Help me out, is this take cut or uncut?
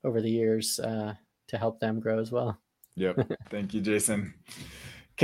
cut